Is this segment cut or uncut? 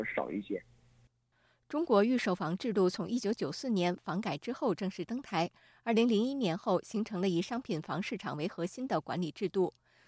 uncut